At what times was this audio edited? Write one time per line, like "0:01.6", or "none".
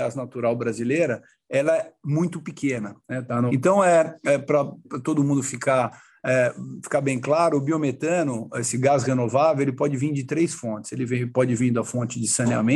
0:03.5